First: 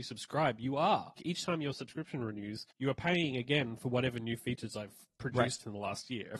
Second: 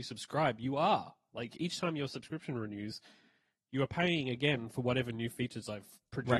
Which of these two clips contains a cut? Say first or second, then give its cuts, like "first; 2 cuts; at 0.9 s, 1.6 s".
first; 2 cuts; at 1.2 s, 2.7 s